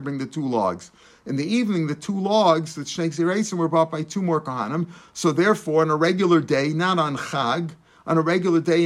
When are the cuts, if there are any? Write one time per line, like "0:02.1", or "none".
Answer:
none